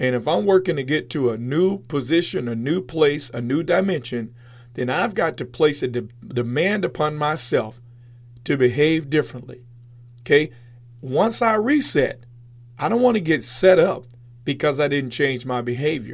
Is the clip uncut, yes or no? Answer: yes